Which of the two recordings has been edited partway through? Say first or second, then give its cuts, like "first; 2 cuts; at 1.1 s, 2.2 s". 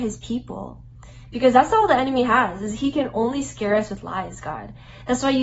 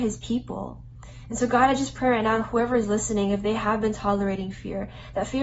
first; 1 cut; at 1.3 s